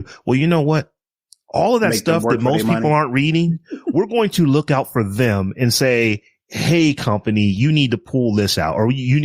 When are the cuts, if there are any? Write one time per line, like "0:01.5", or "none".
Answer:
none